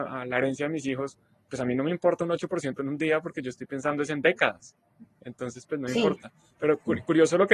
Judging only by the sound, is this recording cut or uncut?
uncut